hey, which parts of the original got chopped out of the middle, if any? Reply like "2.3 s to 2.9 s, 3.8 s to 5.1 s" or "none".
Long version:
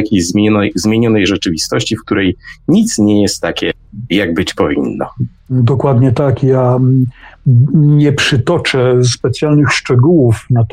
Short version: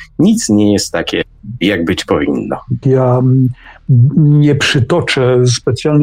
5.3 s to 6.4 s